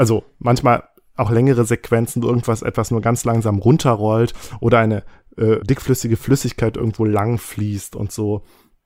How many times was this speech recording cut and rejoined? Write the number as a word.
one